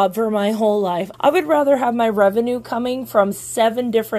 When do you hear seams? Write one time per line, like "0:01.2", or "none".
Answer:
0:01.1

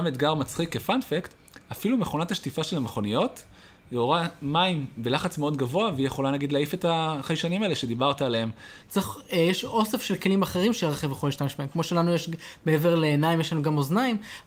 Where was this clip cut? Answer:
0:08.8

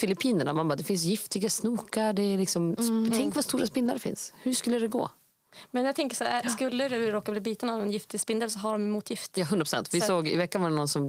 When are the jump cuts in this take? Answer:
none

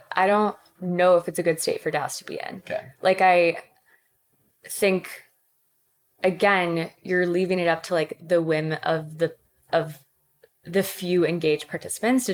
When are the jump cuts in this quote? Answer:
none

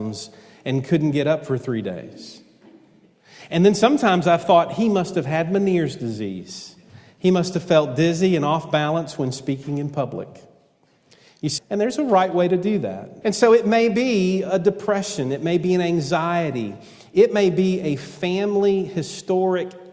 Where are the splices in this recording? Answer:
0:11.6
0:13.2

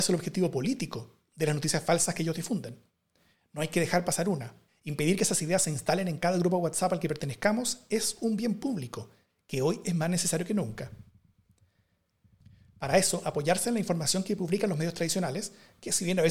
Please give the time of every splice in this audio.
0:04.7

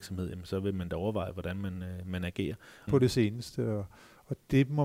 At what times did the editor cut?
0:02.9

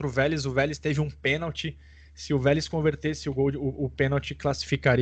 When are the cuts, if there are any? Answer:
none

